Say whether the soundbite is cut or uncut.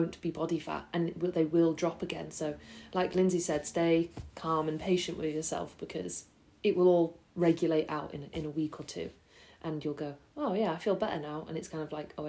uncut